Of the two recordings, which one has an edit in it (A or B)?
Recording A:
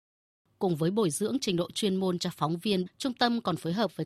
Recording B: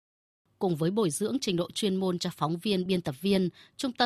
A